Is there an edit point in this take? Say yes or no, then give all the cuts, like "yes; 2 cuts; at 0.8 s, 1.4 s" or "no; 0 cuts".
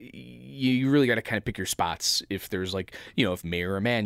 no; 0 cuts